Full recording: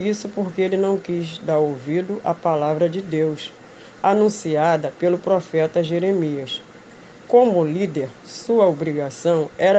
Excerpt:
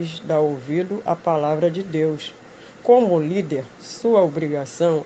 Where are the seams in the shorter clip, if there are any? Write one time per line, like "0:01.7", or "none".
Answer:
0:02.7